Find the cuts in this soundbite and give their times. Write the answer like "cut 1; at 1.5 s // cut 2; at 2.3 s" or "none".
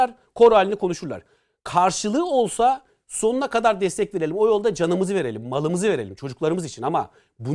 none